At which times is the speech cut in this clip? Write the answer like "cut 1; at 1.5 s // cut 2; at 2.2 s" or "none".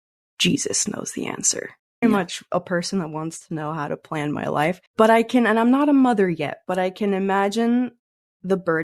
cut 1; at 2.0 s // cut 2; at 4.9 s